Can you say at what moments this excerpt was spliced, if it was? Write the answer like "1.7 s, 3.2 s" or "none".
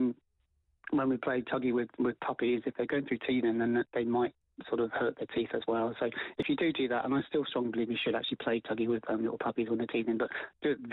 none